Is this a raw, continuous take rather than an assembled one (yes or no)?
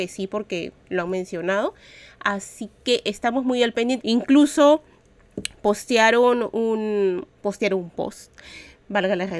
no